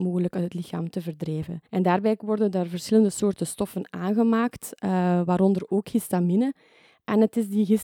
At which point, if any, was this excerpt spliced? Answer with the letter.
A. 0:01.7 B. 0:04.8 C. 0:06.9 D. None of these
A